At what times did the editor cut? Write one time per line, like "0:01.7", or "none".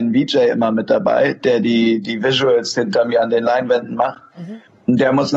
none